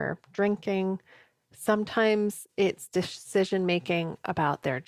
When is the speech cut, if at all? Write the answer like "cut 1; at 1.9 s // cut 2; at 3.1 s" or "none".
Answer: none